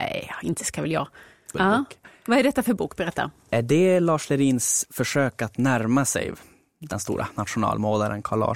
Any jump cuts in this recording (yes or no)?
yes